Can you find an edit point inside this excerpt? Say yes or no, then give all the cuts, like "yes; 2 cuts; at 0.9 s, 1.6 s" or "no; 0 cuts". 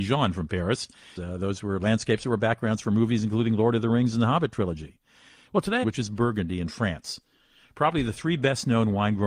yes; 2 cuts; at 1.2 s, 5.8 s